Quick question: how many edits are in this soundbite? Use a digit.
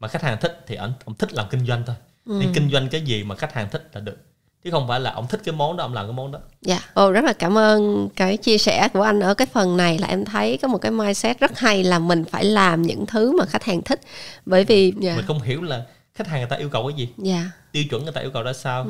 2